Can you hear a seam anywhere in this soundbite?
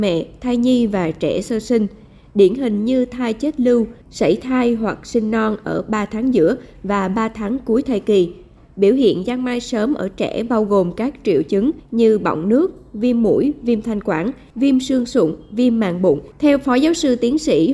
yes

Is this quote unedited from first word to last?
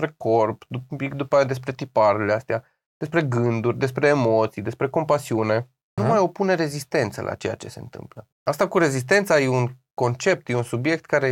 no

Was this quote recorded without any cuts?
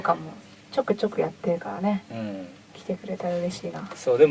yes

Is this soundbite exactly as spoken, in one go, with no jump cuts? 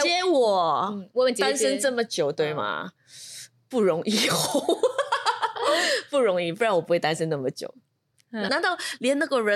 no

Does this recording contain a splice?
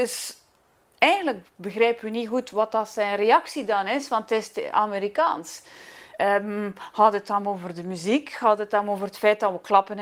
no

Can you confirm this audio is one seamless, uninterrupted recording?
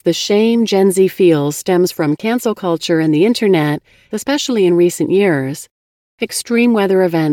no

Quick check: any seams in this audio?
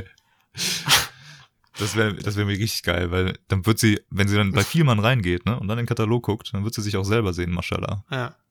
no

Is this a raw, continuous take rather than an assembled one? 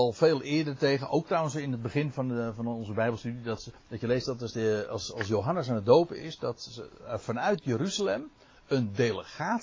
yes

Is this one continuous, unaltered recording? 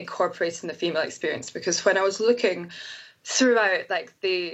yes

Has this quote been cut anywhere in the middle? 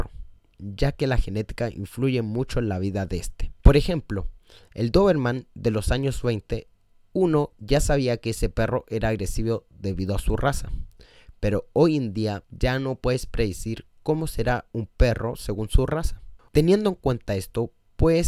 yes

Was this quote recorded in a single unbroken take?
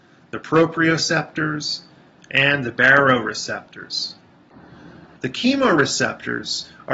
no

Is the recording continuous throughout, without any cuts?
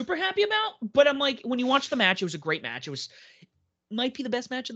yes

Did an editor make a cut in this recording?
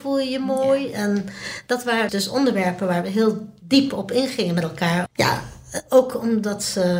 yes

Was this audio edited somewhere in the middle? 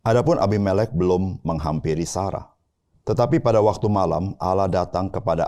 yes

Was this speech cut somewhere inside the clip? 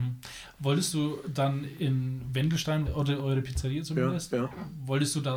yes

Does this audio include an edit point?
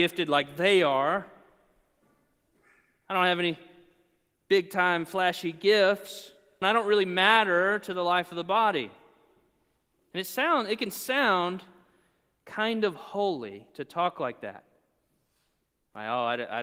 yes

